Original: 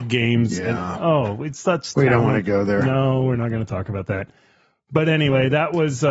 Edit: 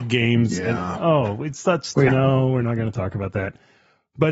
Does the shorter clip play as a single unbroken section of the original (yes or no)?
no